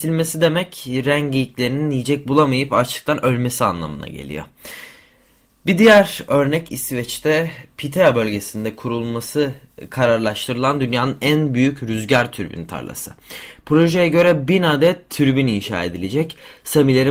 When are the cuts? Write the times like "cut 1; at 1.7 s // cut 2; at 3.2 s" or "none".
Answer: none

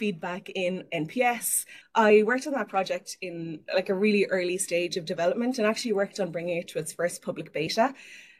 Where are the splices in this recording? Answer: cut 1; at 1.8 s

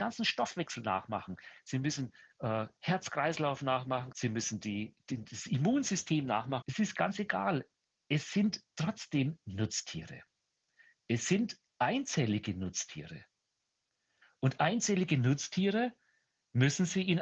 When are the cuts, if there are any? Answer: cut 1; at 4.1 s // cut 2; at 6.6 s

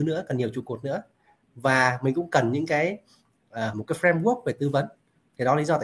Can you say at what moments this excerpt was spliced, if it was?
cut 1; at 3.7 s

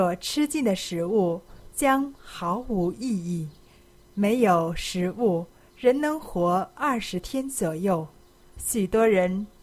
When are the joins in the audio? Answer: cut 1; at 8.6 s

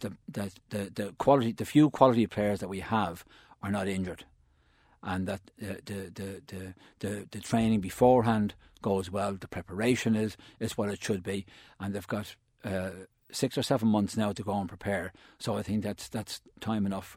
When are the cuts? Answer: none

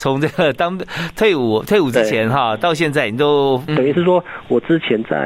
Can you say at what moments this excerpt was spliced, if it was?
cut 1; at 3.7 s

